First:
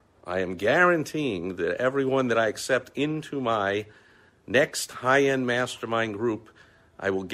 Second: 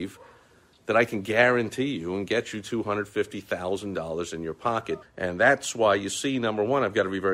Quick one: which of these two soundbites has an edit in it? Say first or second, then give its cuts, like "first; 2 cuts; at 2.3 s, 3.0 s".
second; 1 cut; at 5.0 s